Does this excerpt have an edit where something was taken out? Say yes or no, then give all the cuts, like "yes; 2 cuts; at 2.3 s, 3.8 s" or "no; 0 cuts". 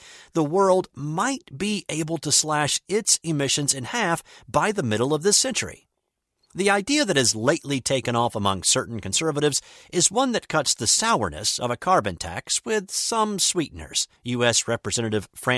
yes; 1 cut; at 14.2 s